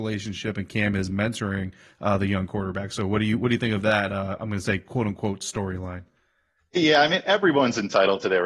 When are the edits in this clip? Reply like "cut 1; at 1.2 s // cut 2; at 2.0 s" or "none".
none